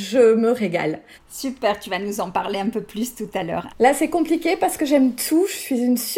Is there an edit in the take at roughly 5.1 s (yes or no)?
no